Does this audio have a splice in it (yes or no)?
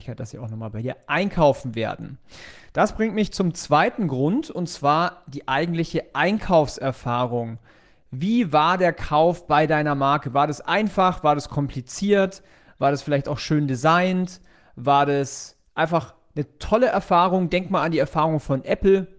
no